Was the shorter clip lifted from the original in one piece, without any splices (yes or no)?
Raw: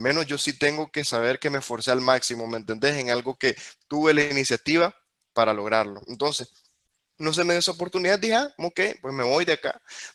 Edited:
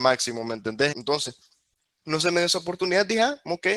no